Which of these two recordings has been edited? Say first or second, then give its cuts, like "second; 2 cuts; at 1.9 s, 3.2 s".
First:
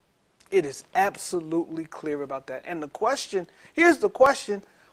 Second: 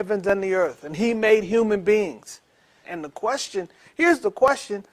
second; 1 cut; at 2.8 s